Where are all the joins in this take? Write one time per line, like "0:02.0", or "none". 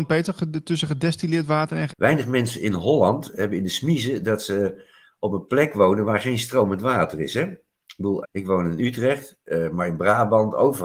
0:01.9
0:08.2